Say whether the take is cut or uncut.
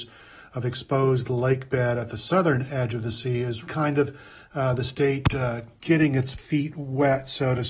cut